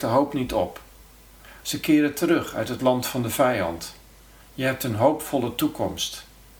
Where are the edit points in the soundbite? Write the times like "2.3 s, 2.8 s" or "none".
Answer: 1.6 s